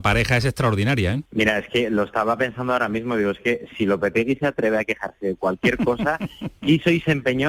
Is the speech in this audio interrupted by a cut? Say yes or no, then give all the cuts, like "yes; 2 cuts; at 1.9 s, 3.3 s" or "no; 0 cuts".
yes; 1 cut; at 1.3 s